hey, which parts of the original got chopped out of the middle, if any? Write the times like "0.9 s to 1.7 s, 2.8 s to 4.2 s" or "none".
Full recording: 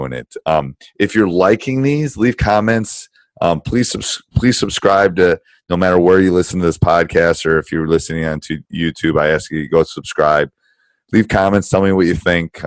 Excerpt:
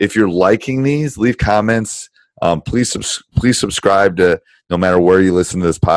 none